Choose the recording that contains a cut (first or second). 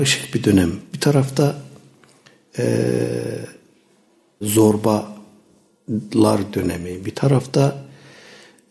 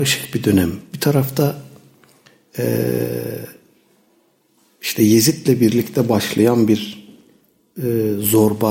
first